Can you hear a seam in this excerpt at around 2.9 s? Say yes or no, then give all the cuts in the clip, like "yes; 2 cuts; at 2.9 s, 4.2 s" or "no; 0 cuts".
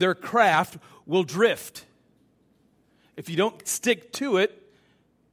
no; 0 cuts